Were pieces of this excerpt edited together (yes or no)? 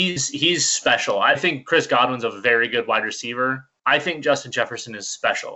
yes